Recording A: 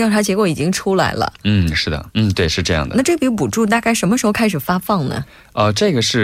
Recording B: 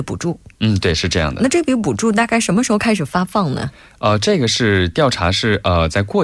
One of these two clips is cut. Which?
A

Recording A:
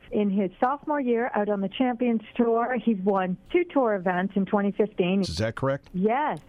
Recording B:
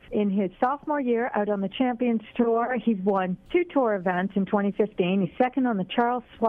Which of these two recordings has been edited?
A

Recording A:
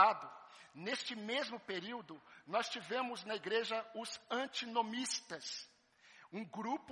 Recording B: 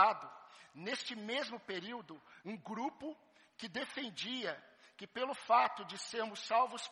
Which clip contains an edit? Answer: B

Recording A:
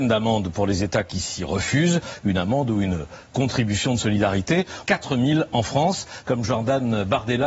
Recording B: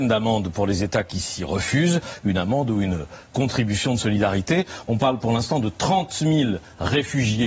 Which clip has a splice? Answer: A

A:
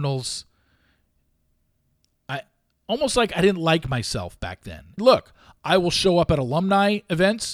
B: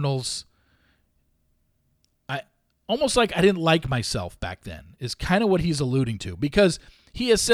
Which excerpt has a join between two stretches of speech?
A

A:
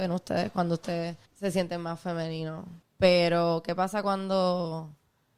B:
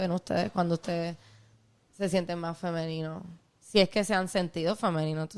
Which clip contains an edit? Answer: A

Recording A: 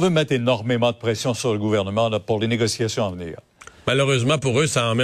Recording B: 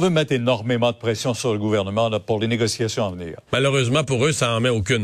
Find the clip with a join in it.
B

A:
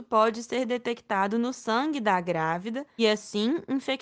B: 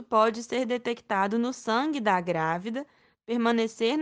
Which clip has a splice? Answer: A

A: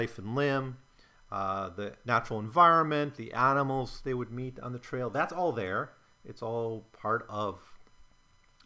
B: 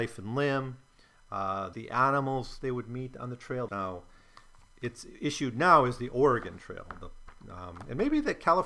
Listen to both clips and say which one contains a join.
B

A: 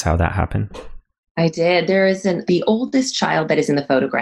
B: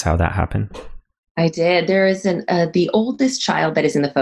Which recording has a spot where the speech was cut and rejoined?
A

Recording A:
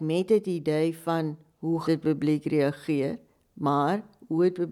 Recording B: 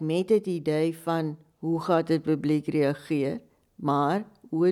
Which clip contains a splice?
A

